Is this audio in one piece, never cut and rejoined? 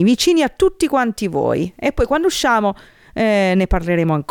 yes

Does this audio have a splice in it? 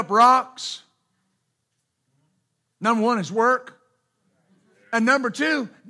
no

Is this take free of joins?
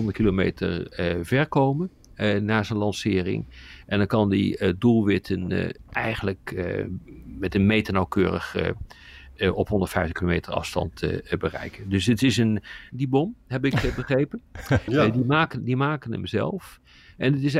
no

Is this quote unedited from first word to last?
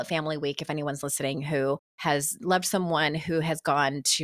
no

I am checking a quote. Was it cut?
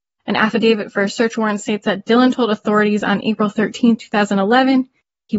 no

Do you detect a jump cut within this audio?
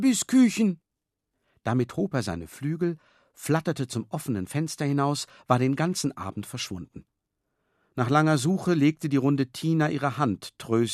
no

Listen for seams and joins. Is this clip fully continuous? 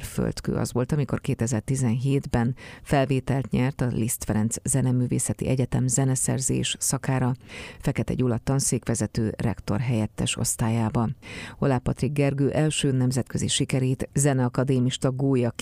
yes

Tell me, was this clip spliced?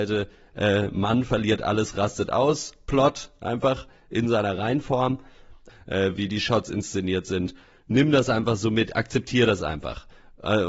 yes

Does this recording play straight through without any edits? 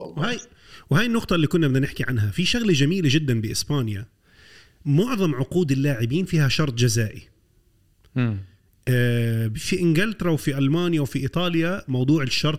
yes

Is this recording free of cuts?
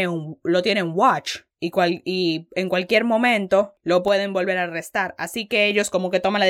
yes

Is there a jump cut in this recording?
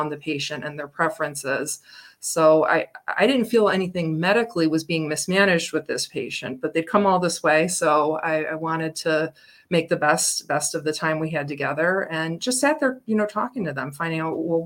no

